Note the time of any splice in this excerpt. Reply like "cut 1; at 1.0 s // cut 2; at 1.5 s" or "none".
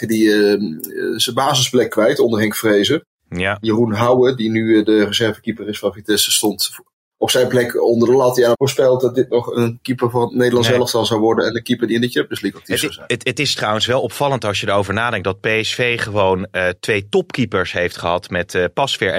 cut 1; at 8.5 s